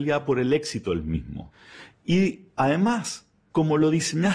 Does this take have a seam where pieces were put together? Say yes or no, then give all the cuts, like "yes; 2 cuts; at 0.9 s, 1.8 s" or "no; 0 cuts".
no; 0 cuts